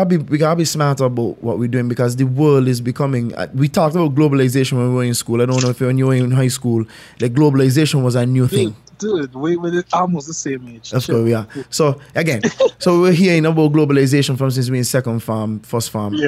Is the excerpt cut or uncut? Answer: uncut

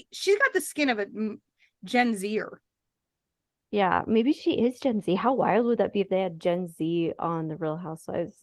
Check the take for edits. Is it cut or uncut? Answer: uncut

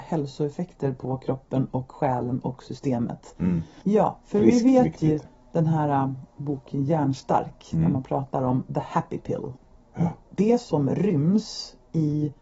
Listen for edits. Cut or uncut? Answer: cut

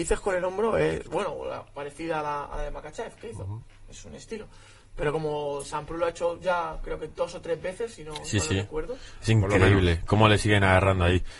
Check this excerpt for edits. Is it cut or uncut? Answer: uncut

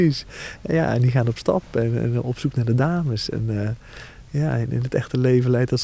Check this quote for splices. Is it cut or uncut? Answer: uncut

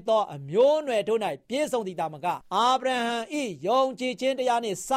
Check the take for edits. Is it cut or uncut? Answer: cut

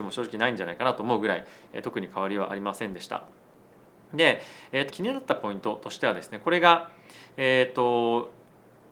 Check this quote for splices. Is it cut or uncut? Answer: cut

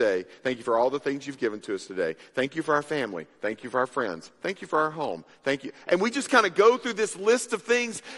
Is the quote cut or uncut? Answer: uncut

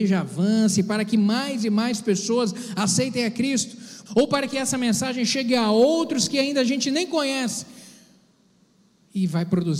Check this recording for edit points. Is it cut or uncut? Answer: cut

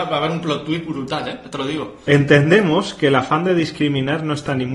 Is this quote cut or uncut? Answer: uncut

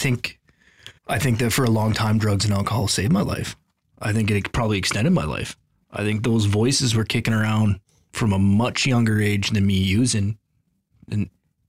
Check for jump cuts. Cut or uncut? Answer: cut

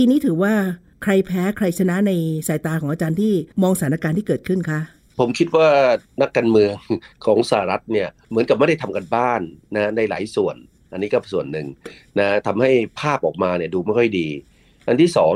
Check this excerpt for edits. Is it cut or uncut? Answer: uncut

